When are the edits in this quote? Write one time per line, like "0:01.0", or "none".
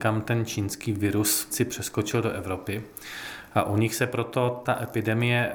0:01.5